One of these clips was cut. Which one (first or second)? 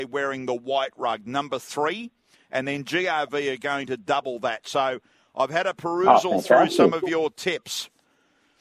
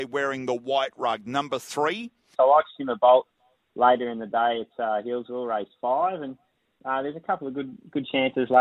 second